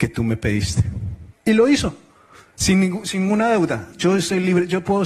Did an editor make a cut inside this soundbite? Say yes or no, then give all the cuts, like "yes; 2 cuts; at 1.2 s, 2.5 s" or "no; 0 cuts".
yes; 1 cut; at 1.3 s